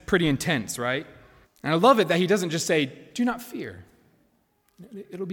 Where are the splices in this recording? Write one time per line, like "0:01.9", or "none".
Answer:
0:01.4